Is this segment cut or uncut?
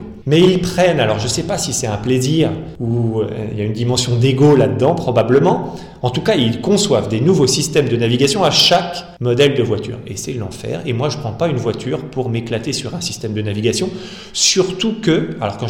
uncut